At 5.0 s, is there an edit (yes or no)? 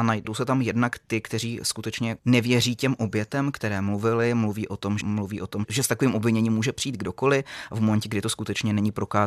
yes